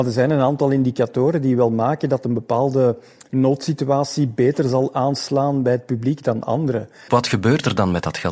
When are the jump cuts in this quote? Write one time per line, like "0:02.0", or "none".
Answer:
0:07.1